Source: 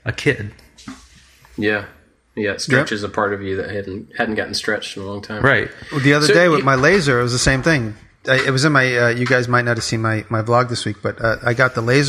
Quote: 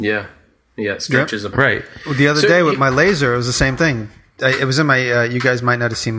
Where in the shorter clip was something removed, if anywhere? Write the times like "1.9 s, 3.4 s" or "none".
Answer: 1.5 s

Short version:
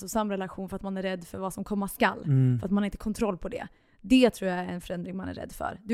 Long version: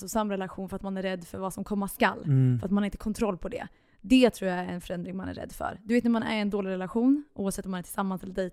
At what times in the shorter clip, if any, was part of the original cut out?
none

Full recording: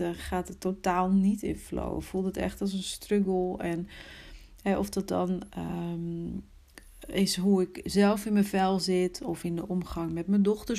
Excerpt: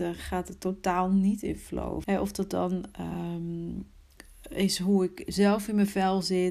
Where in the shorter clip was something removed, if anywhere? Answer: 2.0 s

